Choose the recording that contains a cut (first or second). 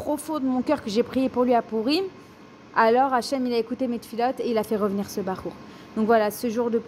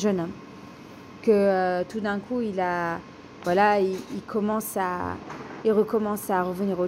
second